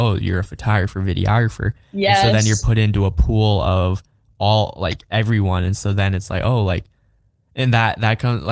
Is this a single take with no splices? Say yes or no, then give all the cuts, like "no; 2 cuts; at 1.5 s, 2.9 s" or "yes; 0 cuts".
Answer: yes; 0 cuts